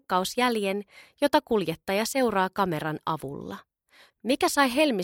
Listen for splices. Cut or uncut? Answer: cut